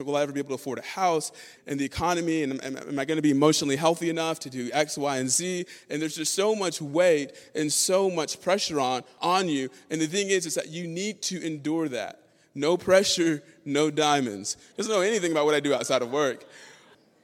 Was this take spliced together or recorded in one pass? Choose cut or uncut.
cut